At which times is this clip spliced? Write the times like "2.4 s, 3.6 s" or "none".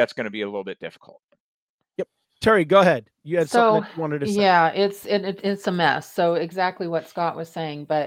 none